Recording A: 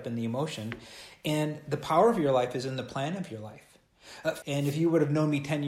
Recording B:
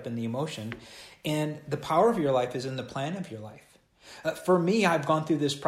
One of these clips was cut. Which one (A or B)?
A